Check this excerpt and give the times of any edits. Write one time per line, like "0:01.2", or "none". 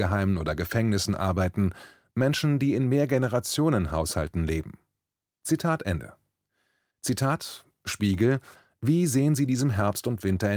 0:06.9